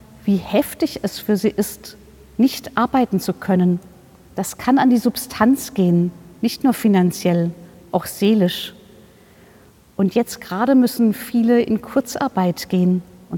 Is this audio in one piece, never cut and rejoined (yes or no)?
yes